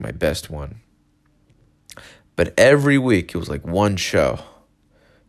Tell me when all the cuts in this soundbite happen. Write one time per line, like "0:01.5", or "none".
none